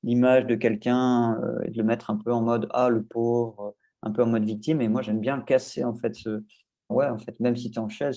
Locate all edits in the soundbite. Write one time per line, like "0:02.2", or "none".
0:06.9